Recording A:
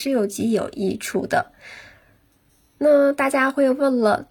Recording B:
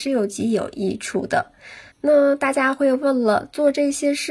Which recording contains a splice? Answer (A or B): B